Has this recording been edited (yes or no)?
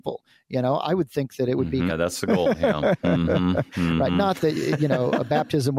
yes